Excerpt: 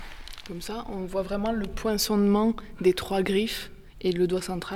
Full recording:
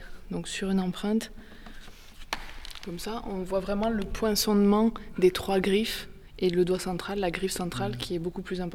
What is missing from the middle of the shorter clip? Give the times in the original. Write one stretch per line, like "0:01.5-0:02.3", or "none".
none